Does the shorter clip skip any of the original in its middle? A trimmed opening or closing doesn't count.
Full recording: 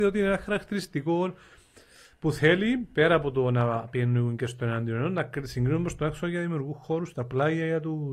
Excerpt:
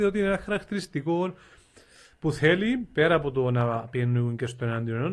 no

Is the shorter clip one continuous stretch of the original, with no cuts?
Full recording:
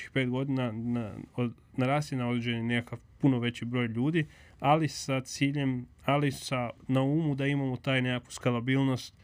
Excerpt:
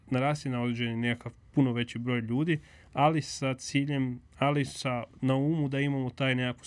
yes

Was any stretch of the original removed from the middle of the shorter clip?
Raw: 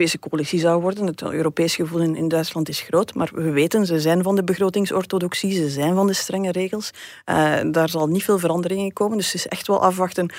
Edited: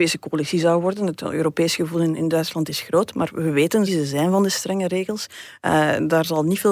yes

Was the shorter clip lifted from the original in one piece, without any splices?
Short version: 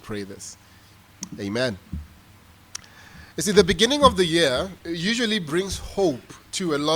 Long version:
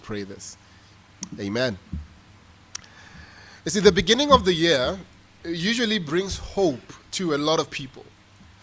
no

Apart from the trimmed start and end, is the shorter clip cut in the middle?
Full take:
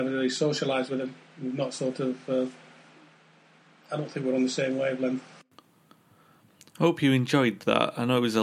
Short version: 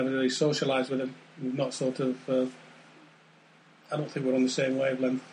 no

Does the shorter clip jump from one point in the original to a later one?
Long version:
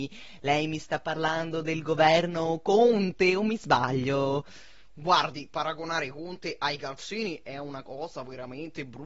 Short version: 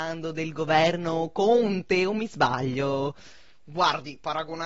no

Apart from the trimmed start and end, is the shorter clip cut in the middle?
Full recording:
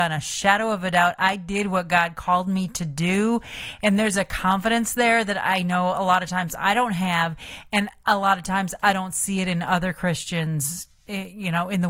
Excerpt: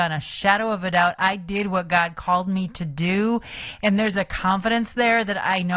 no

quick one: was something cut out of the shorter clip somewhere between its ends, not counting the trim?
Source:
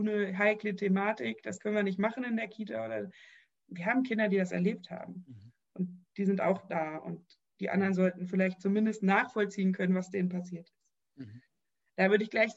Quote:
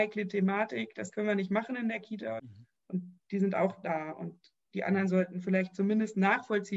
yes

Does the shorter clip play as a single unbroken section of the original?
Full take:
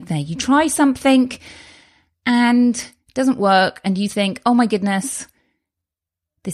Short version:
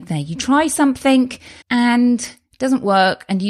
no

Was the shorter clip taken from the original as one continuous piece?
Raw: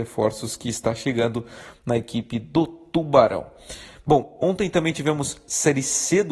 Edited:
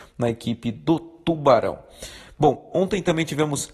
yes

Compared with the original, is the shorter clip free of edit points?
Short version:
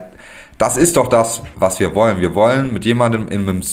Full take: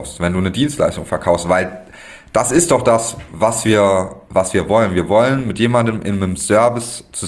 no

